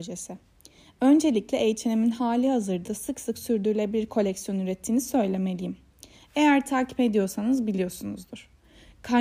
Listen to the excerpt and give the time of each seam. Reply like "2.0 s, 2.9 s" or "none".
none